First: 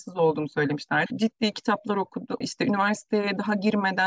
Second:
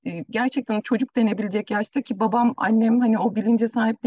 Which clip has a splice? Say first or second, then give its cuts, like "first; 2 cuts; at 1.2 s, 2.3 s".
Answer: first; 2 cuts; at 1.1 s, 2.4 s